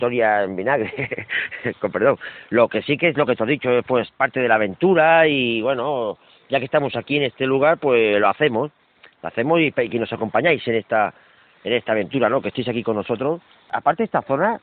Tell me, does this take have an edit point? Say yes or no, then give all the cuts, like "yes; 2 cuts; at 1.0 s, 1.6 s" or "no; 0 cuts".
no; 0 cuts